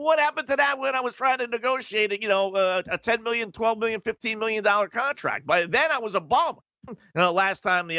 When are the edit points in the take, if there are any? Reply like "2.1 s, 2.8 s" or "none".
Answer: 6.9 s

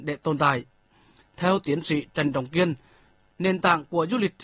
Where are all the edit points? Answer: 1.2 s, 3.3 s

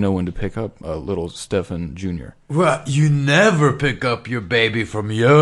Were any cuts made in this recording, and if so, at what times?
none

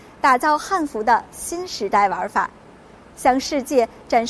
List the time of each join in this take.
none

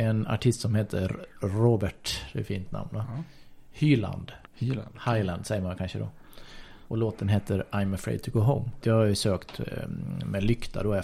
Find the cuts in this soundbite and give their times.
4.5 s, 8.8 s

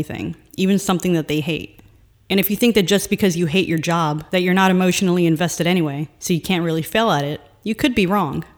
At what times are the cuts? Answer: none

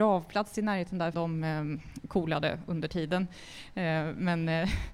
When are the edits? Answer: 1.1 s

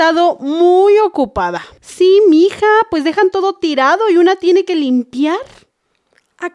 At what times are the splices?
1.8 s

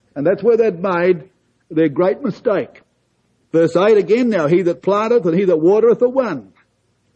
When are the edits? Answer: 3.4 s

